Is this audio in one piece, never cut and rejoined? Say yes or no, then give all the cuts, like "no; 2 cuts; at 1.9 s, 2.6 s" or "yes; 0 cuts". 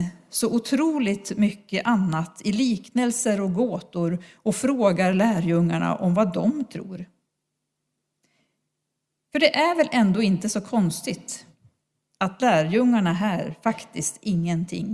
yes; 0 cuts